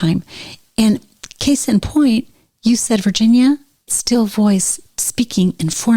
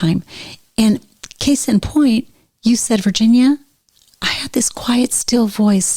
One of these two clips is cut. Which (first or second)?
first